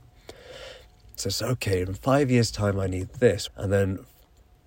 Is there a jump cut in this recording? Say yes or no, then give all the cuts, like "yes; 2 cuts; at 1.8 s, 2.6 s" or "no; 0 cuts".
yes; 2 cuts; at 1.2 s, 3.5 s